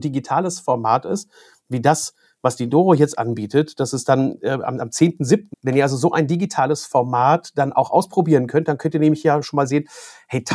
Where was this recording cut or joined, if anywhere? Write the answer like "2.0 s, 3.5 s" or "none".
5.5 s